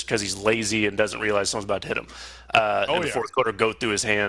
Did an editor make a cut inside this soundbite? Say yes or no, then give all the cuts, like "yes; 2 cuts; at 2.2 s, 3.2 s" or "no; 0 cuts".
yes; 1 cut; at 2.9 s